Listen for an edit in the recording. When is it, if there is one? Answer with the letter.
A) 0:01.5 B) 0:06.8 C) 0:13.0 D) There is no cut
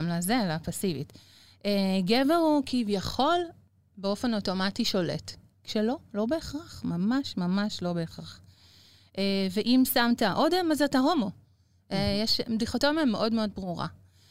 D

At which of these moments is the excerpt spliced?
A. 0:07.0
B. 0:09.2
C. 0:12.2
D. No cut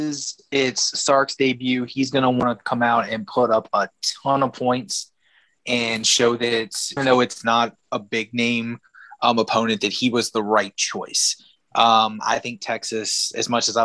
A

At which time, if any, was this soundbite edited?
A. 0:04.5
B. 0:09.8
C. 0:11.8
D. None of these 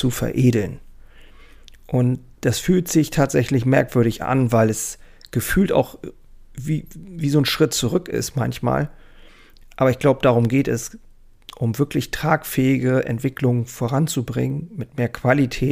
D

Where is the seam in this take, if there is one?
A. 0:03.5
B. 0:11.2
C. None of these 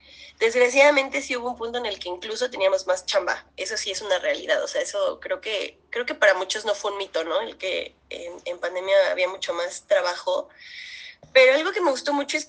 C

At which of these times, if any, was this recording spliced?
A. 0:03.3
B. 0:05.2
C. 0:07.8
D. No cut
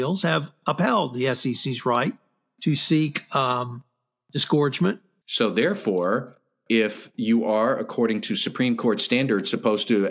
B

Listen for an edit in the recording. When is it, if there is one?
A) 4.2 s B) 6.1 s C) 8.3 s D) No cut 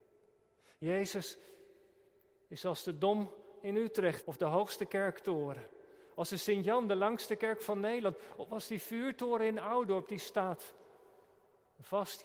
A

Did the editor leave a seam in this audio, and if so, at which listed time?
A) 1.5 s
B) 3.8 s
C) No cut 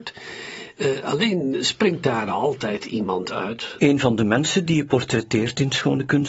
B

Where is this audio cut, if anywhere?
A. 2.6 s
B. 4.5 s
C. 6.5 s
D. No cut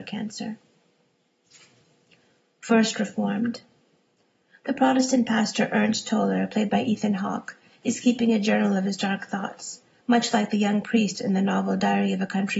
D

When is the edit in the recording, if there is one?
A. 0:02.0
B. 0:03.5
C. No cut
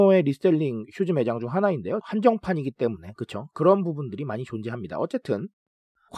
A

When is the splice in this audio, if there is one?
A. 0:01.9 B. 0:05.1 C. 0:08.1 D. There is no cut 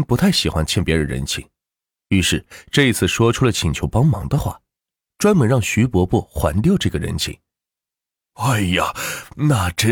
D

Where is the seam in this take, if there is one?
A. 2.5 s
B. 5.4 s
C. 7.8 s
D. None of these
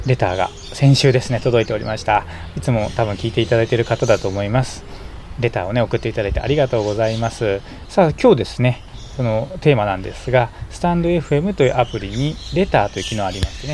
C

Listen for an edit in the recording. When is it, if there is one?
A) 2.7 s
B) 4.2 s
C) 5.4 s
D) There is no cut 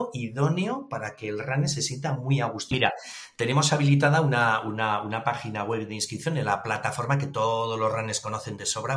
A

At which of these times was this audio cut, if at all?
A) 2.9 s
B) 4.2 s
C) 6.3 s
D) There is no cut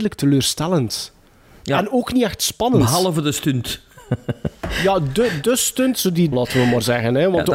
C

